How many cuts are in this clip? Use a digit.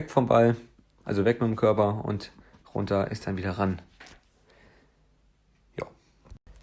0